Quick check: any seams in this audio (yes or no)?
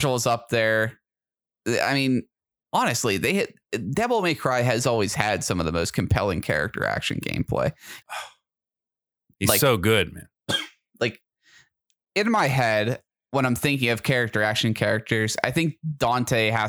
yes